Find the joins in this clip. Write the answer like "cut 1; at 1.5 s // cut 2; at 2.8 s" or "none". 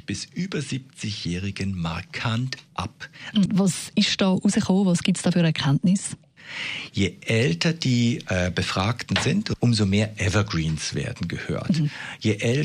cut 1; at 3.5 s